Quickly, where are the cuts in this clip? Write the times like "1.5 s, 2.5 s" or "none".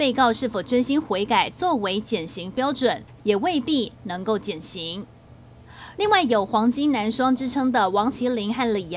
3.2 s, 5.9 s